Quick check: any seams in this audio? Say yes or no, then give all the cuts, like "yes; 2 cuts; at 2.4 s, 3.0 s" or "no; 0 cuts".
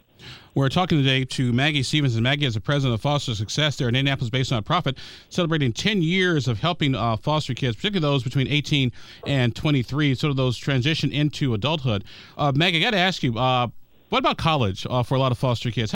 no; 0 cuts